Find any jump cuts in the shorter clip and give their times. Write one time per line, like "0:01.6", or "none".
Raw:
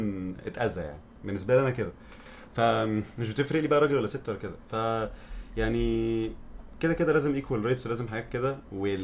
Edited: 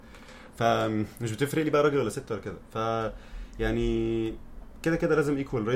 none